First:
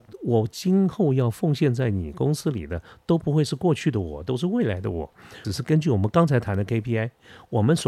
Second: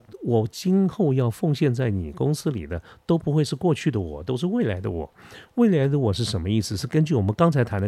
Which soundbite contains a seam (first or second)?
first